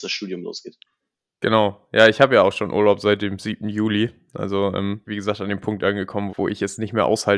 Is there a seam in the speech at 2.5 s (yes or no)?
no